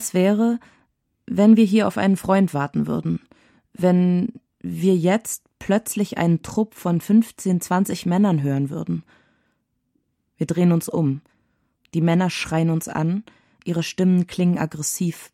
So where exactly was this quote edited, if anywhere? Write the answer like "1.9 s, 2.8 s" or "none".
none